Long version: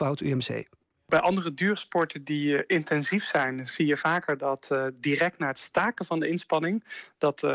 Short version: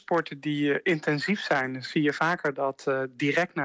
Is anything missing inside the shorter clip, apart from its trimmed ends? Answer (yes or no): no